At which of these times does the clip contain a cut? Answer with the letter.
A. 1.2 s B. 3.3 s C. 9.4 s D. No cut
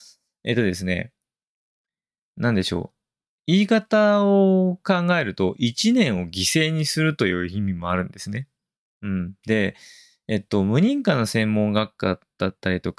D